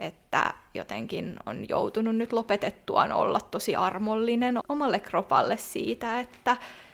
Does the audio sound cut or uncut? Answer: cut